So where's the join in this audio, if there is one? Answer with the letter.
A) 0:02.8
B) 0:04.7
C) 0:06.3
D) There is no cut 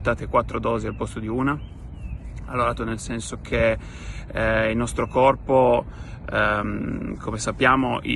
A